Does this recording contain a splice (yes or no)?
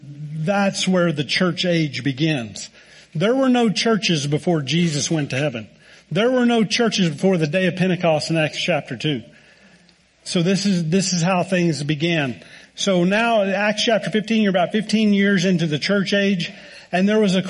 no